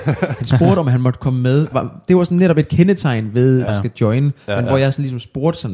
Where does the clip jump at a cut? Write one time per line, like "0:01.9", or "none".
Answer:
0:01.7
0:03.7